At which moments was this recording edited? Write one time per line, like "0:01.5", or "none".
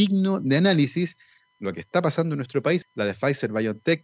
0:02.8